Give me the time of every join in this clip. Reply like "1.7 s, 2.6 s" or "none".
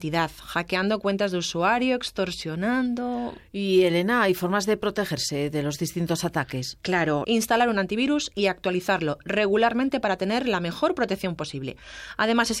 7.2 s